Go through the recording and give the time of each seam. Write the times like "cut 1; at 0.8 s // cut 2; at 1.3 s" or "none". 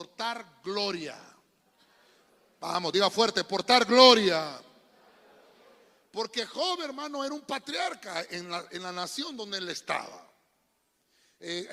none

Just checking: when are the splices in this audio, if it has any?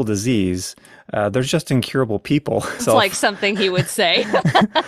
cut 1; at 2.8 s

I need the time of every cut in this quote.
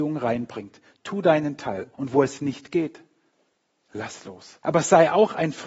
cut 1; at 1.9 s // cut 2; at 4.6 s

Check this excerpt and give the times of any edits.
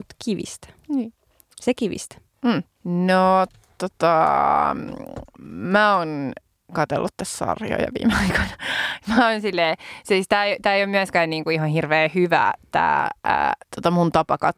cut 1; at 13.6 s

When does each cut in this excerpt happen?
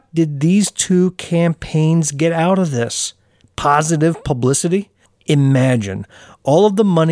cut 1; at 3.4 s // cut 2; at 5.1 s

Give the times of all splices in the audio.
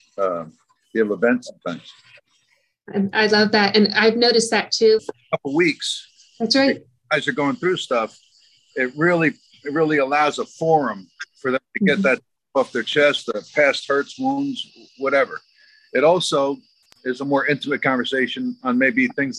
cut 1; at 5.0 s

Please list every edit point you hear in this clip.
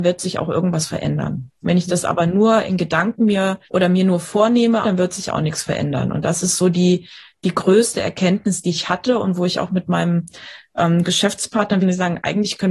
cut 1; at 3.6 s // cut 2; at 4.8 s // cut 3; at 11.8 s

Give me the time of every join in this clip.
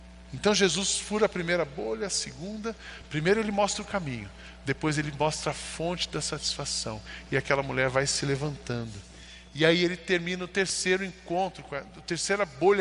none

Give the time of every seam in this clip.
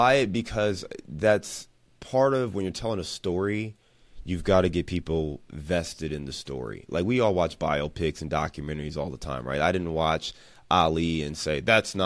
none

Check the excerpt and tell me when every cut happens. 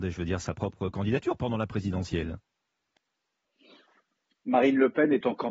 none

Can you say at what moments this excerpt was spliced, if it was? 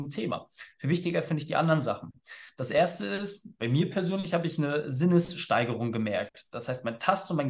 none

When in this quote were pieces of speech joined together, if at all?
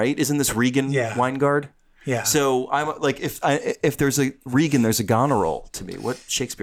none

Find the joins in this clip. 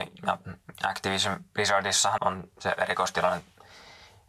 cut 1; at 2.2 s

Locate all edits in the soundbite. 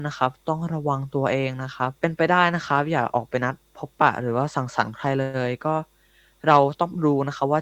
cut 1; at 2.0 s

